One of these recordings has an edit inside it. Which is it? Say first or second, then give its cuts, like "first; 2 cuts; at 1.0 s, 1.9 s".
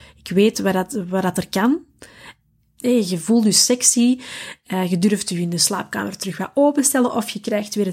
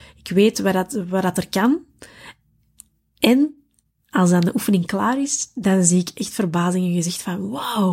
first; 1 cut; at 2.8 s